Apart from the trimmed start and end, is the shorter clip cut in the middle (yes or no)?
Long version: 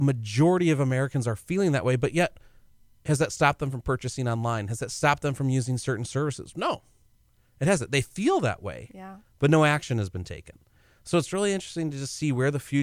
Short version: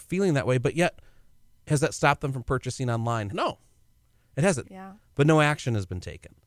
yes